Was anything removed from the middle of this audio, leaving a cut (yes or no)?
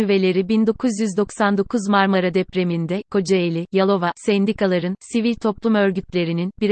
yes